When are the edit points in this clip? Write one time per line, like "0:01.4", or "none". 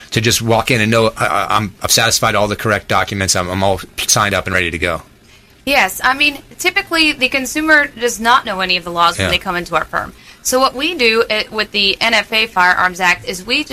none